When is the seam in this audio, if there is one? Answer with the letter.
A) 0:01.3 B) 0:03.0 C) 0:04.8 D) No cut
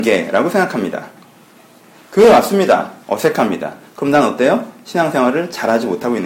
B